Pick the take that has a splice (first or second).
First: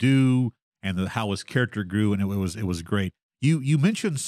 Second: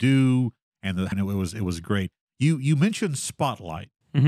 second